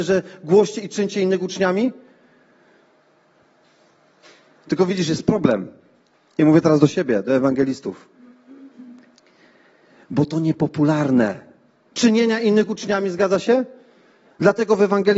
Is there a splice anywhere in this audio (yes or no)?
yes